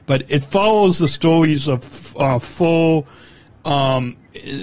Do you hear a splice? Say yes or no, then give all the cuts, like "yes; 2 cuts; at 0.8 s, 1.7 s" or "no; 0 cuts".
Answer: no; 0 cuts